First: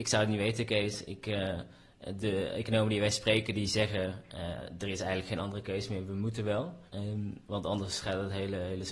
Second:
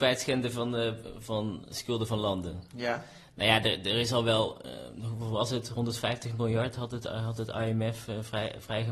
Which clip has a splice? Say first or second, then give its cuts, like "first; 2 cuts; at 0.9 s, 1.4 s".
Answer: first; 1 cut; at 6.9 s